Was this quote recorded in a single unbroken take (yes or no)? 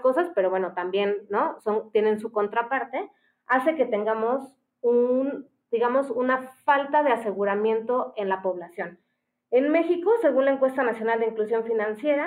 yes